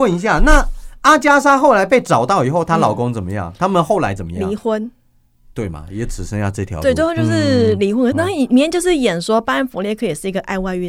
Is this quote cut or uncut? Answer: cut